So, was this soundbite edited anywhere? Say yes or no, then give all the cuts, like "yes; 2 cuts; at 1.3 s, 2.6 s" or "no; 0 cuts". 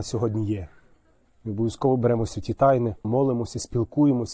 yes; 2 cuts; at 1.3 s, 3.0 s